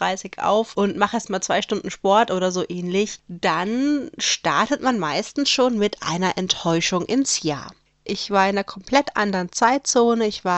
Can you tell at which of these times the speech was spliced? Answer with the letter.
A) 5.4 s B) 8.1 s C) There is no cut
B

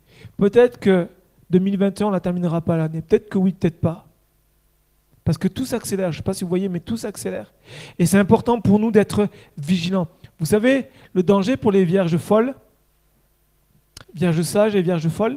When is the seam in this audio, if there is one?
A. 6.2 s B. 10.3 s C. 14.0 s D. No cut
C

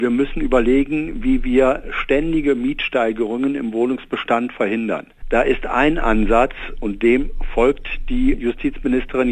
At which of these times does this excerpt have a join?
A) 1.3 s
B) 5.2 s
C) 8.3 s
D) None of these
C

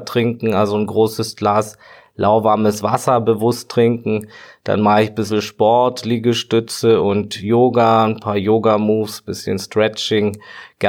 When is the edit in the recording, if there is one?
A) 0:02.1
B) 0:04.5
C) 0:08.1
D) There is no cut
D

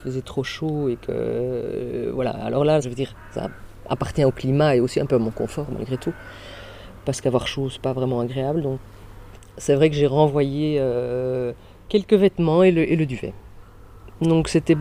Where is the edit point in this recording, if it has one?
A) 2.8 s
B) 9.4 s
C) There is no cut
A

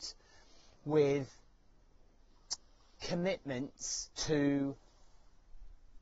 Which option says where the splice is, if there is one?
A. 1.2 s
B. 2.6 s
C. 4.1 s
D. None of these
C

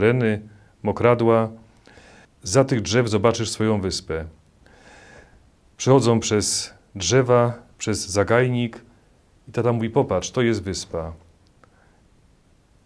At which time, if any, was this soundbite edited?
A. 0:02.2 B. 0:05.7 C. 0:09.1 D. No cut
A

